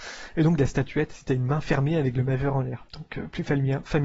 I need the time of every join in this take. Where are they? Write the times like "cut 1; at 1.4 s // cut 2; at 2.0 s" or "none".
cut 1; at 2.9 s